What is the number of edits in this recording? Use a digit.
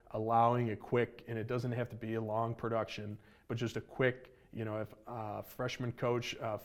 0